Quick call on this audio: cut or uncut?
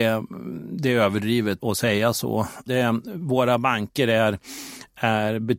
cut